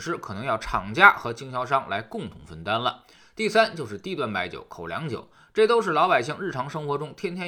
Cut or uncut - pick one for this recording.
uncut